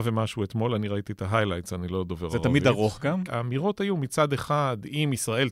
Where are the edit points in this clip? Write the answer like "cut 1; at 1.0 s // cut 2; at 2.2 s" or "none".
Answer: cut 1; at 3.3 s